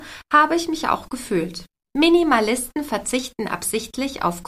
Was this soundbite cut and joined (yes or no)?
yes